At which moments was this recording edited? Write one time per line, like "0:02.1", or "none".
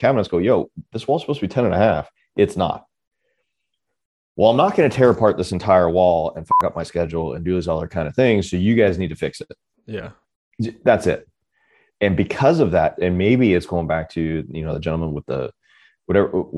0:13.0